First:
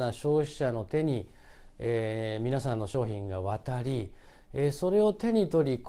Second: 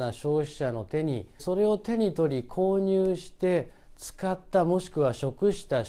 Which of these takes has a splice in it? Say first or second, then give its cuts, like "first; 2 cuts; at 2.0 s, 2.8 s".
second; 1 cut; at 1.4 s